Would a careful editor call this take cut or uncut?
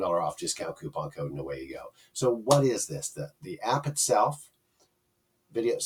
uncut